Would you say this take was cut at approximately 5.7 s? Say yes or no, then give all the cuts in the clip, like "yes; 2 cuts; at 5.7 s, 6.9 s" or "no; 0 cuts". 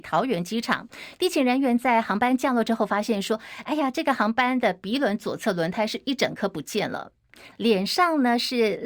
no; 2 cuts; at 1.2 s, 7.5 s